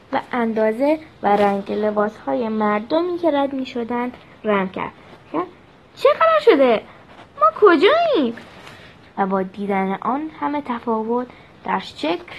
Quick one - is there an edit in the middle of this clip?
yes; 1 cut; at 9.1 s

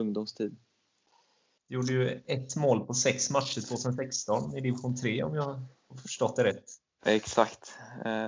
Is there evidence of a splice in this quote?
yes; 1 cut; at 1.6 s

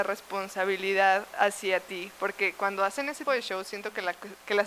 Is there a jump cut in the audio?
yes; 1 cut; at 3.3 s

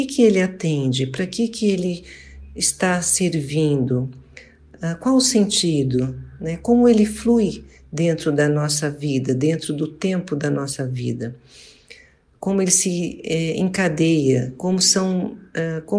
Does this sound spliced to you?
no; 0 cuts

